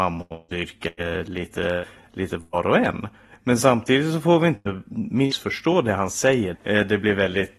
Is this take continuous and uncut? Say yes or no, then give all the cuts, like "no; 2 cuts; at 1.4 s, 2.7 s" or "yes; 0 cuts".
no; 2 cuts; at 3.3 s, 6.5 s